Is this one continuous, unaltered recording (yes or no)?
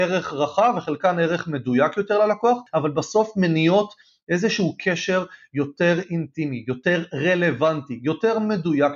yes